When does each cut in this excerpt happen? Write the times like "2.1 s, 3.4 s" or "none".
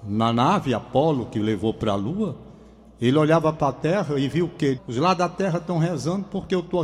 4.8 s